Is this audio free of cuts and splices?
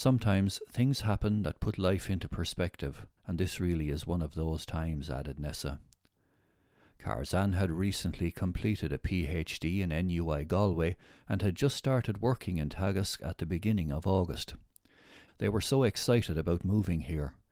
no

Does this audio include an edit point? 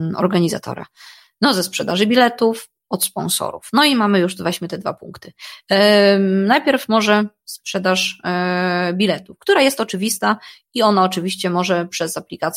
no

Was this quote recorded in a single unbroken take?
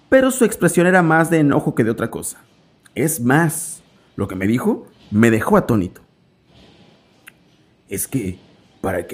yes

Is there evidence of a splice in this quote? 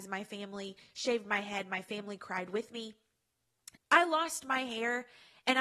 yes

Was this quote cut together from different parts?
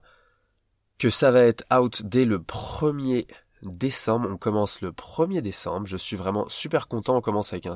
no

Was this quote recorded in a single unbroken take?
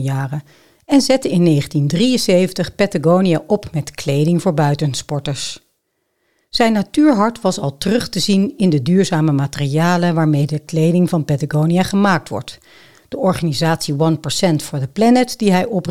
yes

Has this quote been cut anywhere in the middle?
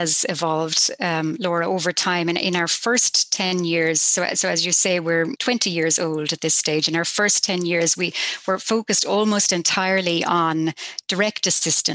no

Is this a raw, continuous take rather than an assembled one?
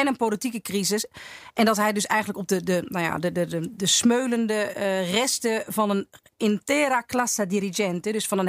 yes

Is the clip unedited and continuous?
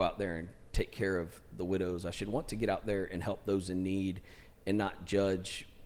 yes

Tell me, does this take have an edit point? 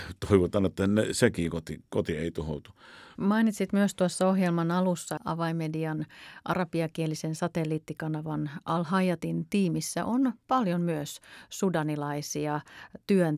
yes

